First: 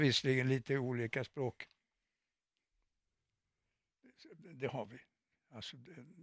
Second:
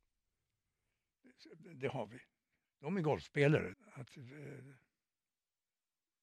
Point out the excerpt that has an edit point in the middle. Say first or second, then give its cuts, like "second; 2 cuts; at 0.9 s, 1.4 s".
second; 2 cuts; at 2.6 s, 3.7 s